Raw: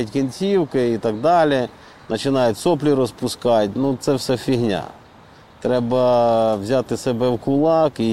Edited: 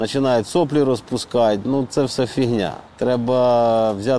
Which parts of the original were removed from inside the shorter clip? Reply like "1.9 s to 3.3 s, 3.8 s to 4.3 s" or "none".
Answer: 5.0 s to 5.5 s